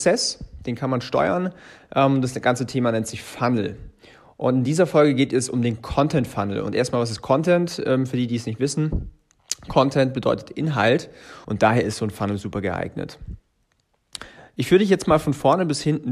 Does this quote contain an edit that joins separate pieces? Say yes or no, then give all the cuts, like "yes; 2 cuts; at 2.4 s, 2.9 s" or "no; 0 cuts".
yes; 1 cut; at 11.4 s